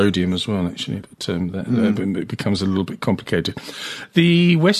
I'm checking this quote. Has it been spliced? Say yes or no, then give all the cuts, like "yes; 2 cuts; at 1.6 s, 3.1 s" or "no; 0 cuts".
no; 0 cuts